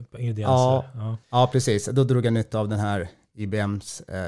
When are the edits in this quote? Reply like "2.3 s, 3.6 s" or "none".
1.2 s

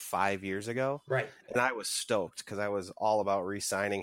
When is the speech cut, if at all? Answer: none

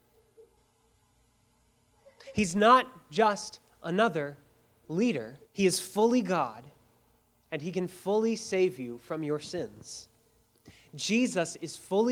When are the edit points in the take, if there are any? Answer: 5.4 s

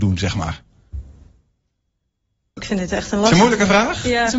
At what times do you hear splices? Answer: 2.6 s

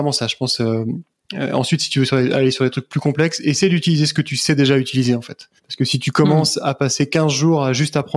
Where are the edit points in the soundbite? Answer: 5.6 s

